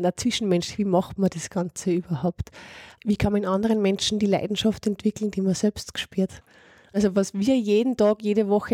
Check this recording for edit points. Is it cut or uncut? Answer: uncut